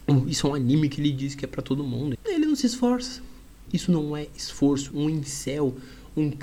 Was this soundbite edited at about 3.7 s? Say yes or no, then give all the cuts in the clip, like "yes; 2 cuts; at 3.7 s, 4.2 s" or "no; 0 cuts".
yes; 3 cuts; at 2.1 s, 3.7 s, 4.9 s